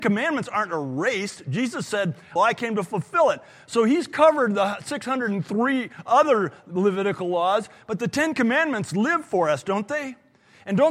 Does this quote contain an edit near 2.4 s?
yes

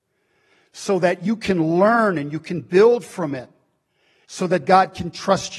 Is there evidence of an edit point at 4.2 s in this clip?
yes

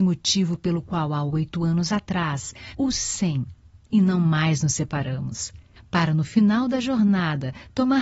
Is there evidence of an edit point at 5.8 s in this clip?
yes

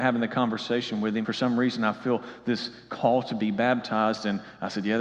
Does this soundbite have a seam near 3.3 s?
no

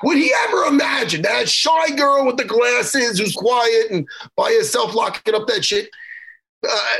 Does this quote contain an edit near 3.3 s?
yes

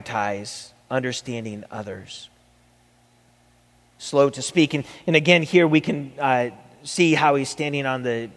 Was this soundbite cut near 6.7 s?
no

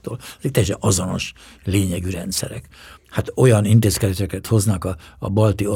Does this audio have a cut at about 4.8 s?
no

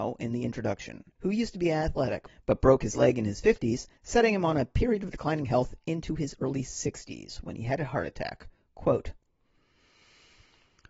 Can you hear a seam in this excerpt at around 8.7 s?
no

